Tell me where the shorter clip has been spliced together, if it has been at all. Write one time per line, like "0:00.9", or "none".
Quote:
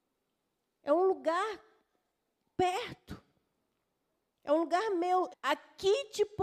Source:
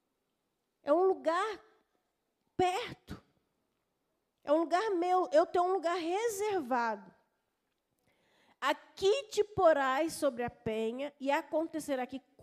0:05.3